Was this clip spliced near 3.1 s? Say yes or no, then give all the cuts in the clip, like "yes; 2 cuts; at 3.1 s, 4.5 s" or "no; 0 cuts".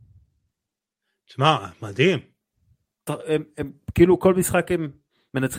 yes; 1 cut; at 3.1 s